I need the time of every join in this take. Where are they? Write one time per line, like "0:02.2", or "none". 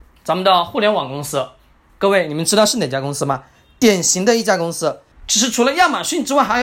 0:05.1